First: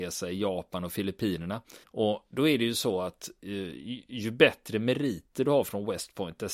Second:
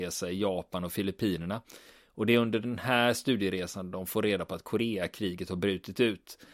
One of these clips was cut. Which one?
first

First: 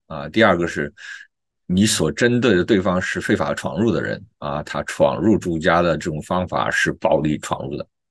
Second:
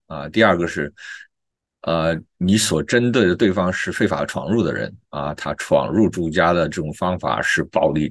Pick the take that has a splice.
first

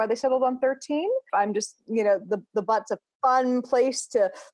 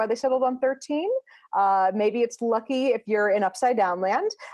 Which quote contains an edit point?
first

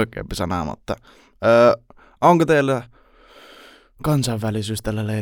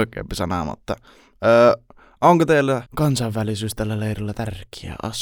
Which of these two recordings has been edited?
second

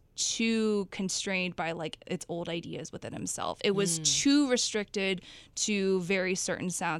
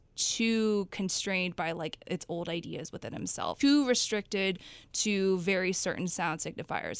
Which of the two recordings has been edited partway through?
second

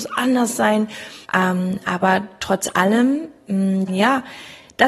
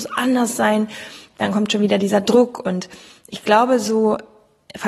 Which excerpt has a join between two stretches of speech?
first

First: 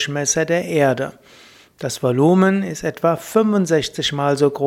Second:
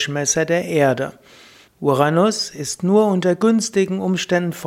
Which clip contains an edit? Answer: second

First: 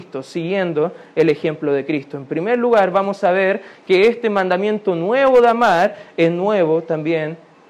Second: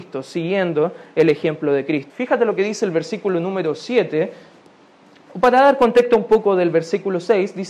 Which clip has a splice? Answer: second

